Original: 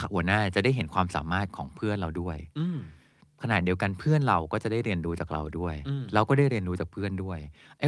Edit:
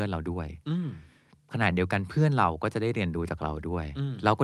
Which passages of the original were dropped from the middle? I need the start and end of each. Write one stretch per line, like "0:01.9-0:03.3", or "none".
none